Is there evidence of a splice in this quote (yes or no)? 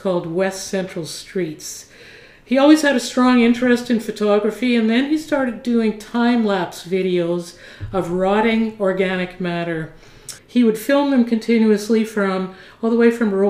yes